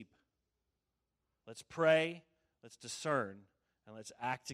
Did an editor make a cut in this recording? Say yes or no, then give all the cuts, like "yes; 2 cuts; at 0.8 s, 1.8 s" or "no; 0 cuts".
yes; 1 cut; at 1.4 s